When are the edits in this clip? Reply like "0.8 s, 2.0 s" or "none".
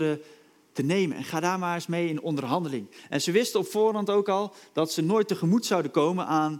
none